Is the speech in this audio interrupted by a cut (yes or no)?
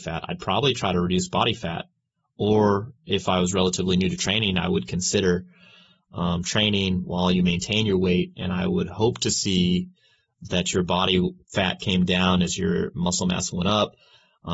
no